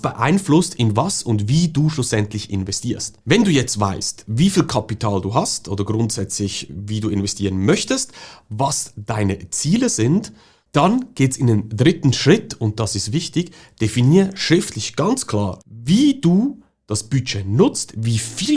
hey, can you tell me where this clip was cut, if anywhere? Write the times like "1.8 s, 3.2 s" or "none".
3.2 s, 15.6 s